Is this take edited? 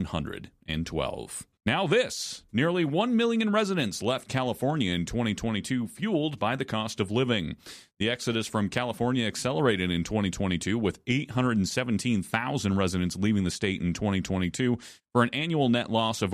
yes; 1 cut; at 1.6 s

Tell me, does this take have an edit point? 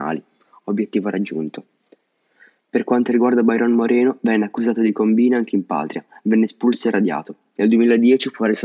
no; 0 cuts

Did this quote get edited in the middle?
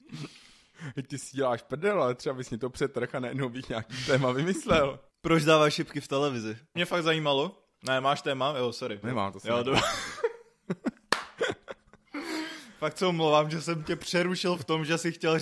yes; 3 cuts; at 5.1 s, 6.8 s, 9.0 s

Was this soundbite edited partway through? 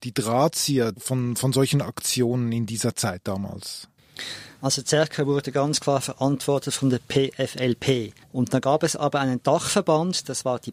yes; 2 cuts; at 4.5 s, 8.2 s

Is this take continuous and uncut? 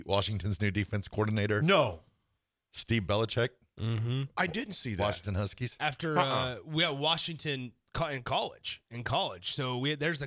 yes; 0 cuts

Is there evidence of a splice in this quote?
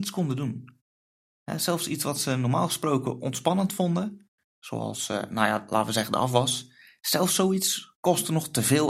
no; 0 cuts

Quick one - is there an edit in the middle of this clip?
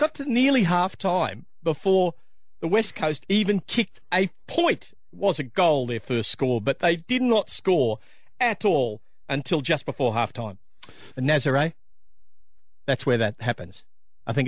yes; 1 cut; at 11.1 s

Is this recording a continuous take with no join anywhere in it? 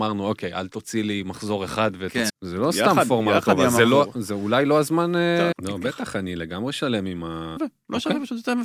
no; 3 cuts; at 2.3 s, 5.5 s, 7.6 s

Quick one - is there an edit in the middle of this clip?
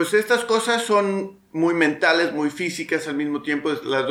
no; 0 cuts

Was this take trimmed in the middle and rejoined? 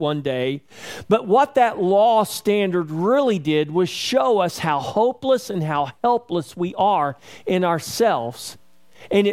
no; 0 cuts

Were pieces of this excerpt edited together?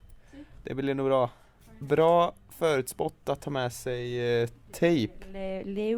no; 0 cuts

